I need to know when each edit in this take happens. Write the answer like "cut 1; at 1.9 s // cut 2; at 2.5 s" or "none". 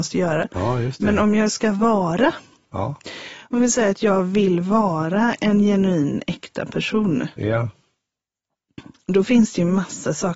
none